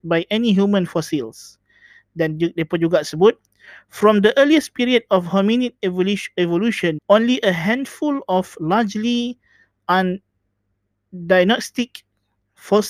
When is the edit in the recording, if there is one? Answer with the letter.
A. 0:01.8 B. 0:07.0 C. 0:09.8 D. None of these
B